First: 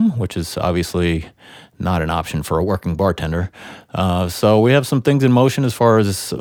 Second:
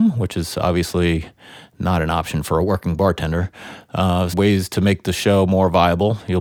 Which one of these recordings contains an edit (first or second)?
second